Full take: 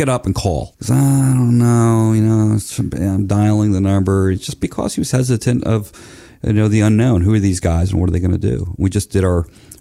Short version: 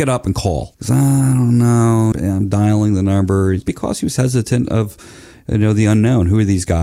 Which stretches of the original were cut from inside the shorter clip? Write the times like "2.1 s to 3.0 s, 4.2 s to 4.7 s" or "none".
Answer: 2.1 s to 2.9 s, 4.4 s to 4.6 s